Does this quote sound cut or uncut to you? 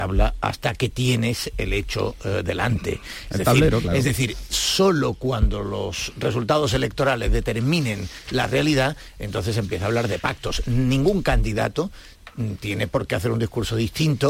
uncut